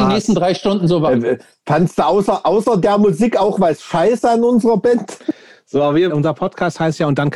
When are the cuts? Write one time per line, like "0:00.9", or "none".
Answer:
0:06.1

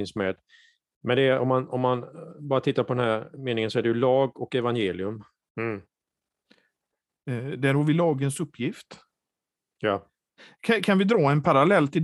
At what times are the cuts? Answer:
0:05.4

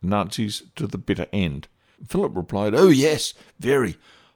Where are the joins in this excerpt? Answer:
0:01.9

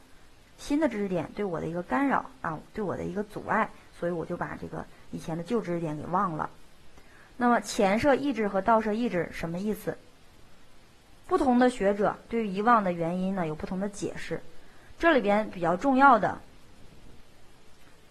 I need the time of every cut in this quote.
0:11.3

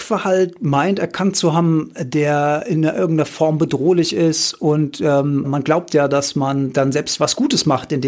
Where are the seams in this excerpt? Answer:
0:05.4

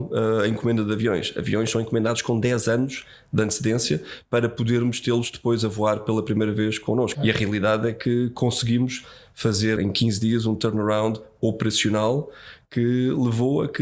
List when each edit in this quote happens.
0:07.1
0:09.8

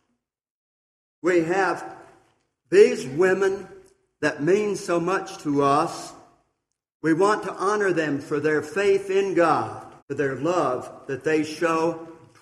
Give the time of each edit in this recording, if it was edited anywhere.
0:06.9
0:10.0

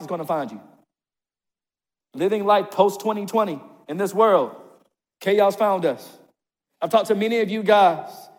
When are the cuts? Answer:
none

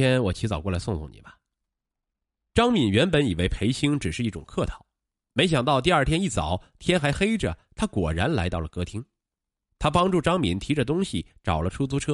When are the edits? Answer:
none

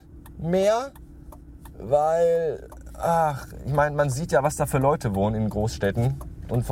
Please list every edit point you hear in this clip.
none

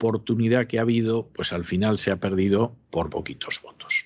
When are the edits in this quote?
0:03.1

